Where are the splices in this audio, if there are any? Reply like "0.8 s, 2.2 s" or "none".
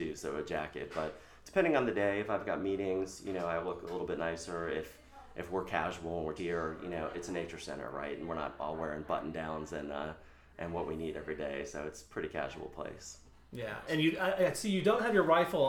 6.4 s